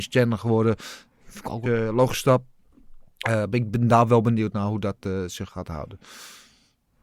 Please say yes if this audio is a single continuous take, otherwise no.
no